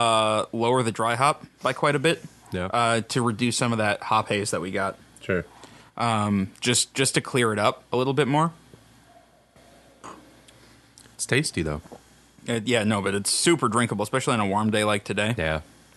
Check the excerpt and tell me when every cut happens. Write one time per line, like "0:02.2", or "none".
none